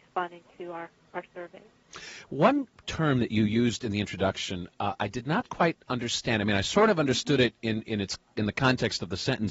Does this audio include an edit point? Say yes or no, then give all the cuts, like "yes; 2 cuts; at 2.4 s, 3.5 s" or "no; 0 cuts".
no; 0 cuts